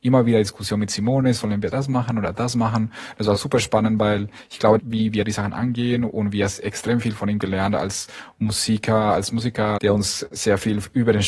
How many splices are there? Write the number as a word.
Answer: two